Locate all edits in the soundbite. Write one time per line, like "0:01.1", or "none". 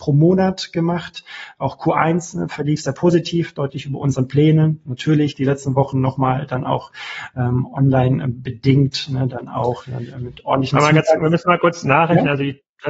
none